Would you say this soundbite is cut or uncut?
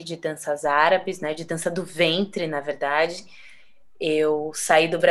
uncut